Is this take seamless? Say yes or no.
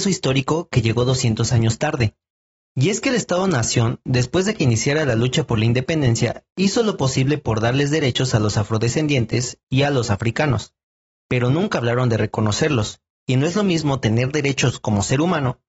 yes